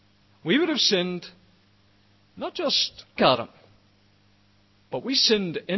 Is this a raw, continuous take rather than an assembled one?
no; 1 cut; at 3.2 s

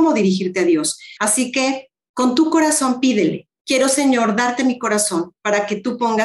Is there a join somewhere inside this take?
yes; 2 cuts; at 1.2 s, 3.6 s

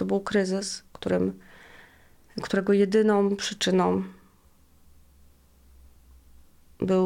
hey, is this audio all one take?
yes; 0 cuts

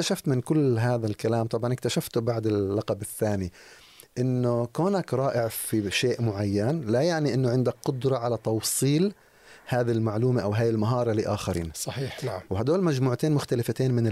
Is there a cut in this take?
no; 0 cuts

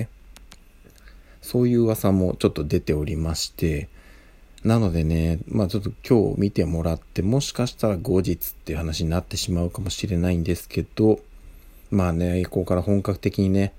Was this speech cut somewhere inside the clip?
no; 0 cuts

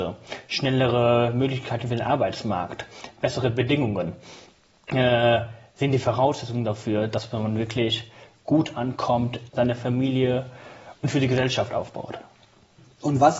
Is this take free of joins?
no; 1 cut; at 9.5 s

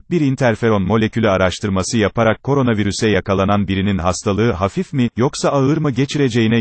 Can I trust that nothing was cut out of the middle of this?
yes; 0 cuts

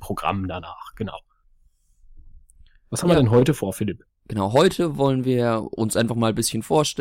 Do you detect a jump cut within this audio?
no; 0 cuts

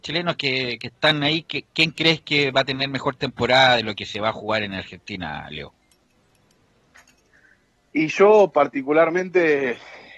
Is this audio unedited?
yes; 0 cuts

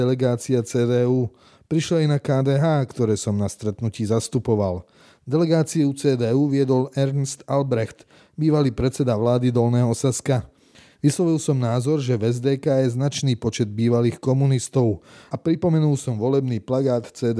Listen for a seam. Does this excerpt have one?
yes; 1 cut; at 11.0 s

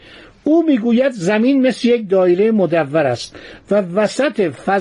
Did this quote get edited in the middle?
no; 0 cuts

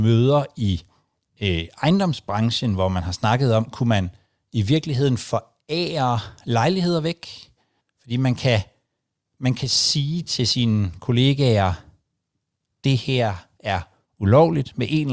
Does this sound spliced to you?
yes; 1 cut; at 7.8 s

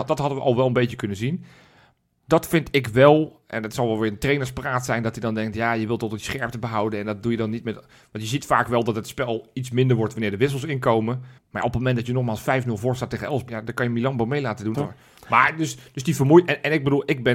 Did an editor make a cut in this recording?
yes; 3 cuts; at 11.4 s, 13.5 s, 14.7 s

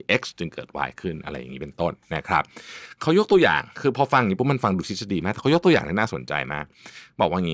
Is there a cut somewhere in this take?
no; 0 cuts

